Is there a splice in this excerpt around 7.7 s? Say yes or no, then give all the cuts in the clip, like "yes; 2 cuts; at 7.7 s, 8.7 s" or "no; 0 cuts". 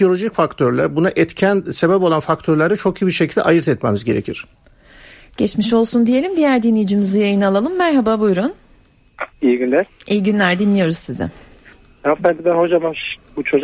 no; 1 cut; at 9.3 s